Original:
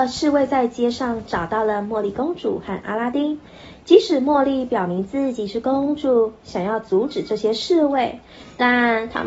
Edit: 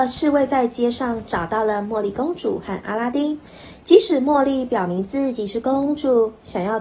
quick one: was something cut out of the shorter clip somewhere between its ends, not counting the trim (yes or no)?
no